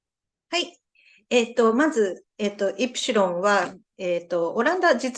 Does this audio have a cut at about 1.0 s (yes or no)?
no